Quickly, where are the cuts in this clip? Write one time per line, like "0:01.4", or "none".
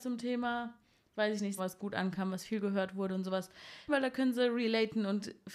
0:01.6
0:03.9

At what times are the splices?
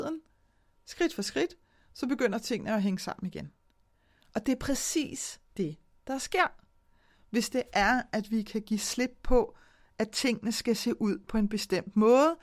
none

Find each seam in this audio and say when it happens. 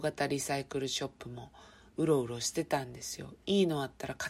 none

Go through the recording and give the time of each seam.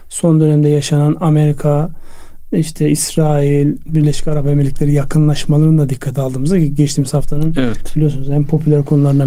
0:03.9

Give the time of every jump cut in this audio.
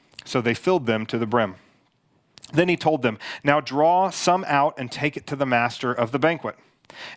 none

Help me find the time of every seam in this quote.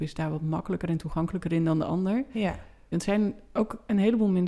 0:02.9

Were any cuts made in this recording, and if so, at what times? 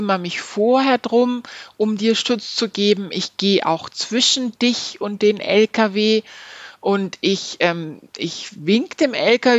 none

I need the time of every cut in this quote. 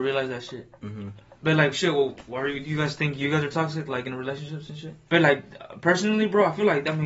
0:05.1

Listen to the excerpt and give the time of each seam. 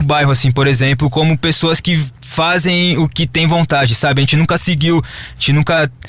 0:02.2

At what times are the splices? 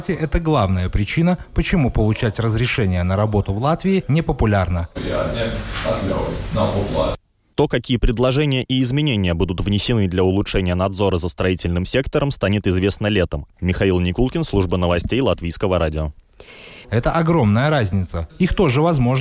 0:13.5
0:16.8
0:18.3

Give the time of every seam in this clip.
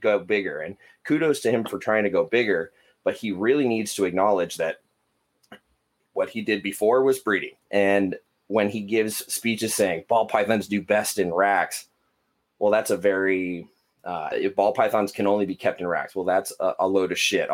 0:07.6
0:14.3

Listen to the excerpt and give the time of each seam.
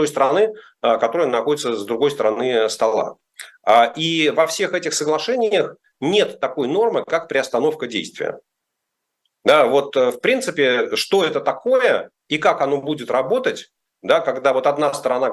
none

